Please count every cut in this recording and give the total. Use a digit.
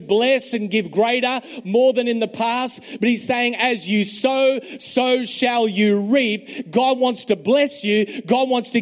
0